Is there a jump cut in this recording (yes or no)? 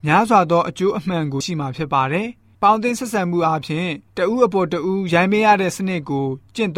yes